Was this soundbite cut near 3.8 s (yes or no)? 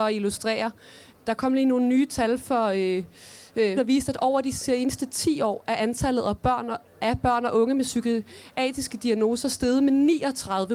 yes